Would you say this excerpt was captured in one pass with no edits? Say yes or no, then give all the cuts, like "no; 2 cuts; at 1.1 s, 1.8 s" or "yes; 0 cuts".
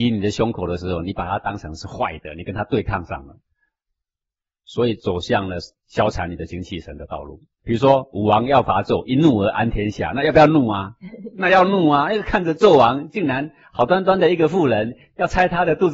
no; 1 cut; at 7.6 s